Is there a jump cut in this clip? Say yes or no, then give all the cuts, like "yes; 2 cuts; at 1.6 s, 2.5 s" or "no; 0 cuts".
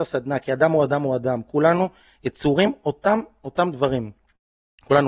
no; 0 cuts